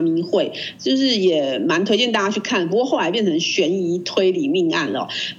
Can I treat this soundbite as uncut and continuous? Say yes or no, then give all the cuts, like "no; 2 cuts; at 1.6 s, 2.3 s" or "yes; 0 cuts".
yes; 0 cuts